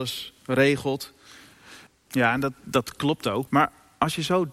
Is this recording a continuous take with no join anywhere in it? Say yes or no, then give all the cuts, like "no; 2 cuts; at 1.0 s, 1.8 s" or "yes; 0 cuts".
no; 2 cuts; at 1.9 s, 3.5 s